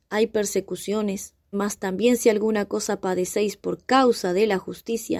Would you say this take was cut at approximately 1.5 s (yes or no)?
yes